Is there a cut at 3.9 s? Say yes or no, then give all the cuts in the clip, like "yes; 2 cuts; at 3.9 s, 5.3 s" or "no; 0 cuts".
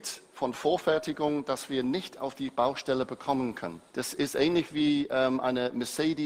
yes; 1 cut; at 3.9 s